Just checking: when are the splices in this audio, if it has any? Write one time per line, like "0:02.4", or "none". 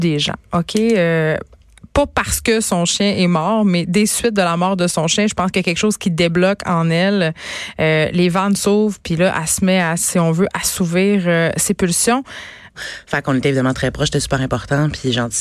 0:12.7